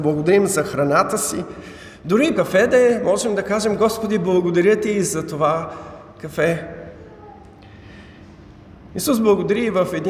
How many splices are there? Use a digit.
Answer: 1